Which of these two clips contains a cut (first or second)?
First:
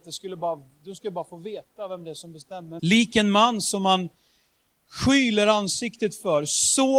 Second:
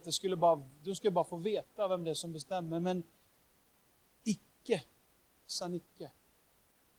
first